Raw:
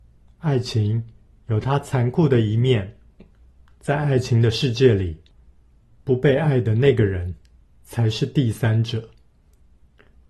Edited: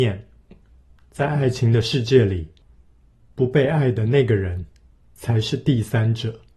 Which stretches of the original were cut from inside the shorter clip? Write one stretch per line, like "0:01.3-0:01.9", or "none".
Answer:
none